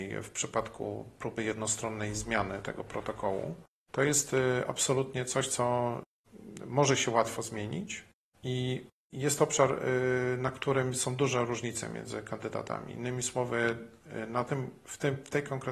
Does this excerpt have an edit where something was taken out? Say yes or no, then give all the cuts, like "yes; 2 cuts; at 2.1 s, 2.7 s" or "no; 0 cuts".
no; 0 cuts